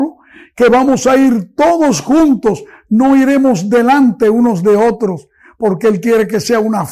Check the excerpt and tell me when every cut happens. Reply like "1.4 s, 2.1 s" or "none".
none